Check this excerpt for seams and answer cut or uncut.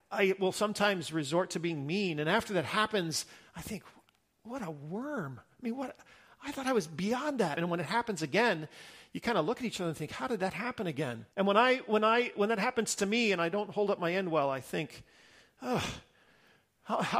cut